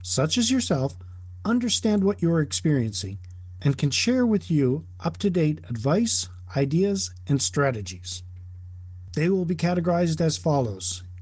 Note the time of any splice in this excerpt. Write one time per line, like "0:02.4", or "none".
0:09.1